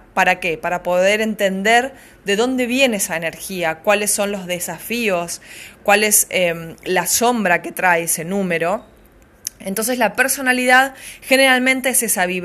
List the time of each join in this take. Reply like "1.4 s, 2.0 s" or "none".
none